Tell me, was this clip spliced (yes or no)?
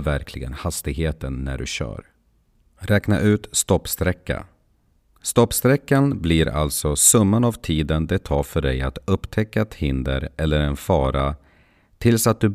no